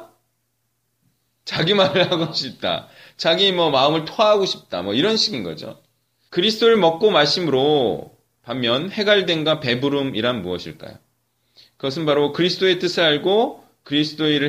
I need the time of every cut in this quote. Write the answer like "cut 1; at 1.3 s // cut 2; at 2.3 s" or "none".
cut 1; at 6.3 s